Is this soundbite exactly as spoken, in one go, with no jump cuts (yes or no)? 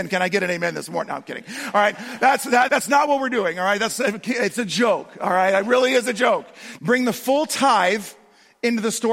no